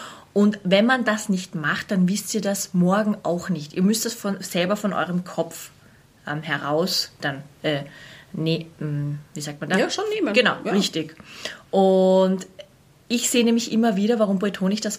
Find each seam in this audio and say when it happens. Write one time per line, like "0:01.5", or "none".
none